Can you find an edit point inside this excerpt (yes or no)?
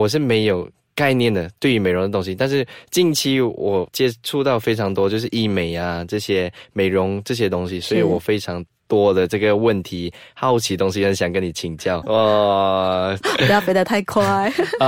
yes